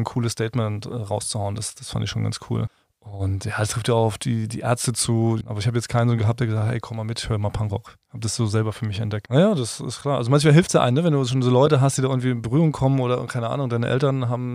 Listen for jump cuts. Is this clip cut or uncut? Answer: cut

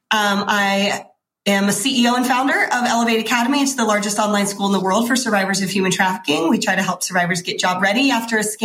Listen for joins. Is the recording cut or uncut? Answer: uncut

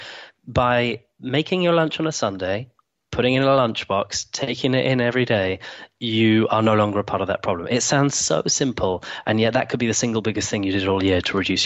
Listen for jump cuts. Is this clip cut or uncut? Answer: uncut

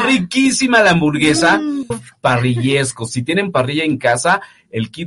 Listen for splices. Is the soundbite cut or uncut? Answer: cut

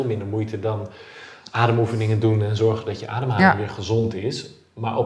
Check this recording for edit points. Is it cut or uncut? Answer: uncut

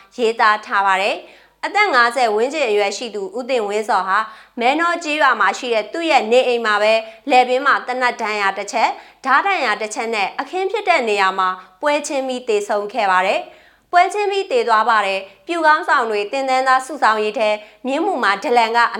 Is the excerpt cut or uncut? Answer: uncut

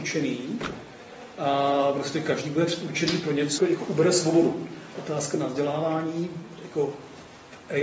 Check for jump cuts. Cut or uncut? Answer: cut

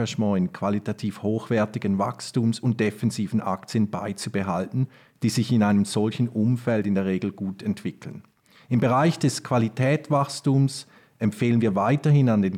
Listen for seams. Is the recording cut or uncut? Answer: uncut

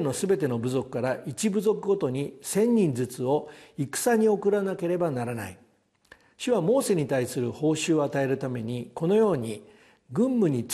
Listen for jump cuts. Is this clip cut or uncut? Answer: uncut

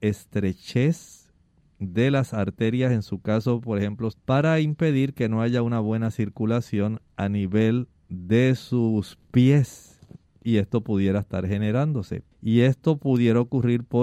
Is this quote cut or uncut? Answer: cut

